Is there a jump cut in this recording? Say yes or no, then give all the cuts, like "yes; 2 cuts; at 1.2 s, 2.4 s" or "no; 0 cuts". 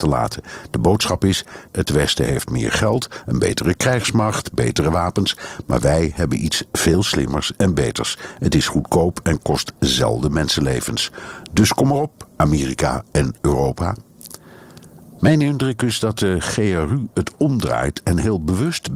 yes; 2 cuts; at 1.7 s, 15.2 s